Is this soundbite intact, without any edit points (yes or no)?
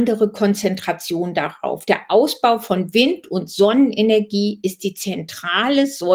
yes